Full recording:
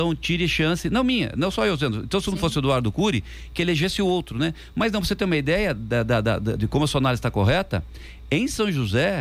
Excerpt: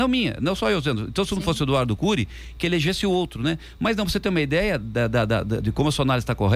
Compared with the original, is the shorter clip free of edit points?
yes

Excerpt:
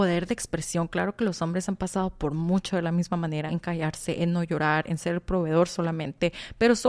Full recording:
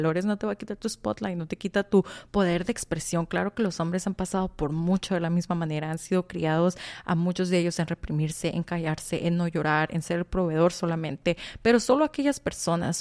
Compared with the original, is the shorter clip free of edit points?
no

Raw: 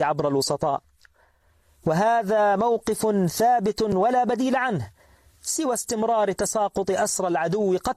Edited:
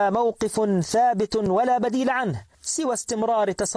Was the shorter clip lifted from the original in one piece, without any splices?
no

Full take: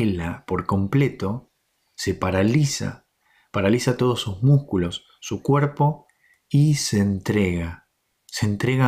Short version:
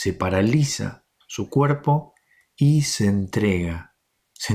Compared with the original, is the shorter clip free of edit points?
no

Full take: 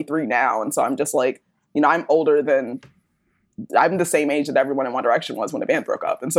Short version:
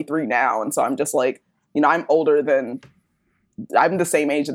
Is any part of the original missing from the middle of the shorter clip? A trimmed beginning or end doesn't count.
no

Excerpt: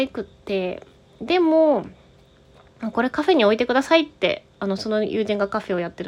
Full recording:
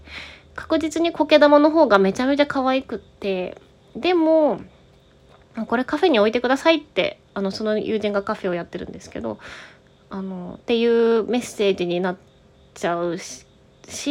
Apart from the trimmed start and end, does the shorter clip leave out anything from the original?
no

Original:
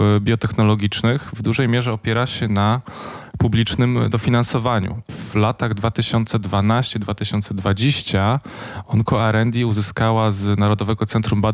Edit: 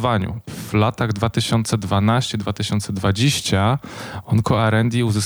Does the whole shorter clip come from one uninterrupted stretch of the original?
yes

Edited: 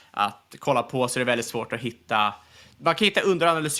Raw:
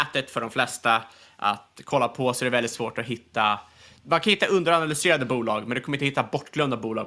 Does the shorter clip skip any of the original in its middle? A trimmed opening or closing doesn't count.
no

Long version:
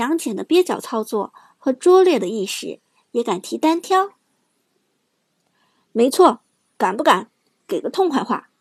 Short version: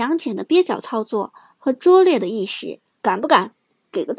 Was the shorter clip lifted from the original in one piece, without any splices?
no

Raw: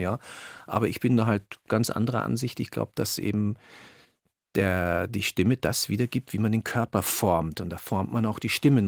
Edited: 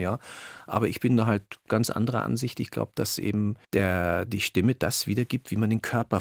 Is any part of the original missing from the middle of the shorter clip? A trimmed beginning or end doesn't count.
yes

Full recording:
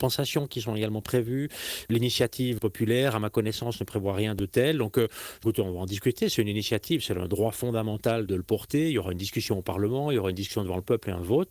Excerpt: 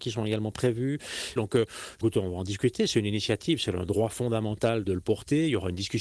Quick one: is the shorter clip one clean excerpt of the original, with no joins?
no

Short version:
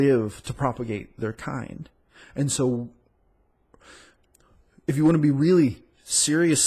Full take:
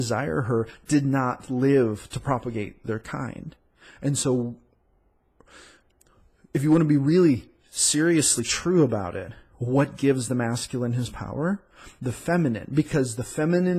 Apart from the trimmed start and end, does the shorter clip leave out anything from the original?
no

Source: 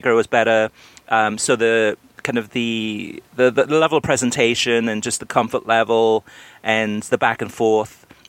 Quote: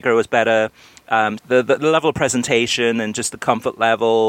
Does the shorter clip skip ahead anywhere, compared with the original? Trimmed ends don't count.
yes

